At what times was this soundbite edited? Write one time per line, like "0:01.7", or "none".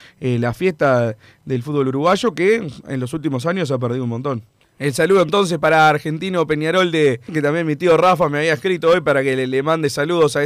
0:04.6
0:07.3

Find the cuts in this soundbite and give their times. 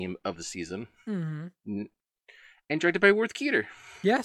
none

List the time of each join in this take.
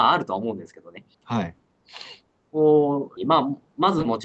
0:01.1
0:03.2

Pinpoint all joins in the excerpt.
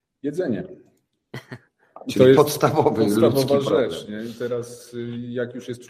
none

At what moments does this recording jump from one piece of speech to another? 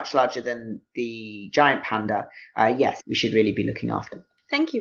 0:03.0

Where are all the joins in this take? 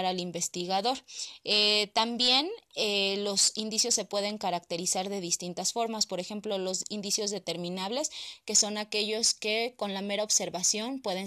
none

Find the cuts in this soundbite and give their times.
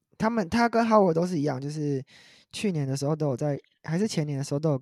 none

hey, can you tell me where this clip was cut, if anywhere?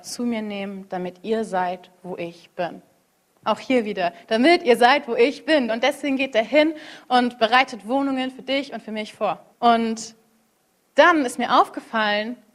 0:05.7
0:09.5

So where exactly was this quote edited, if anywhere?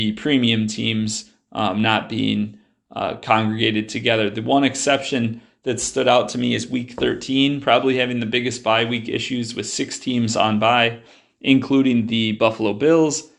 none

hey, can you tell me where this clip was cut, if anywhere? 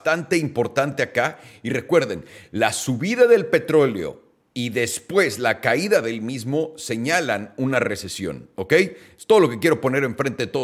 none

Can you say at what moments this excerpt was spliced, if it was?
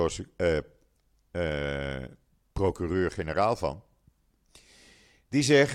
none

